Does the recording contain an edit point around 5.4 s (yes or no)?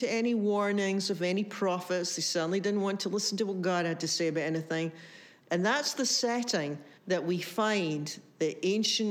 yes